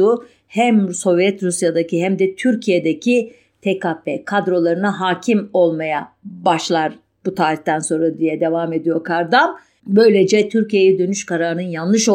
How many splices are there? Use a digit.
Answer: 1